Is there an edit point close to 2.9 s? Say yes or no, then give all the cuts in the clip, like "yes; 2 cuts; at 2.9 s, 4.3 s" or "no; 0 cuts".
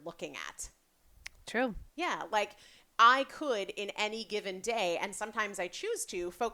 no; 1 cut; at 1.4 s